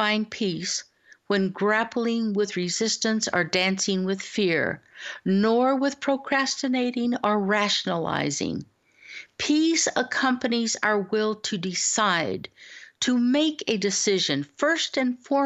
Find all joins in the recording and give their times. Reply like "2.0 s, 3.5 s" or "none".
none